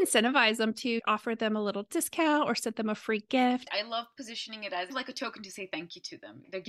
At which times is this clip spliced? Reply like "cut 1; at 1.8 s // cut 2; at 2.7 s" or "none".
cut 1; at 3.6 s